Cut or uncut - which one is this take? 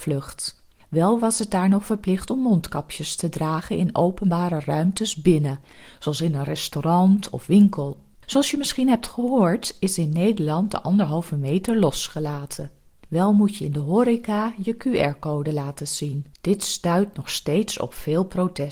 cut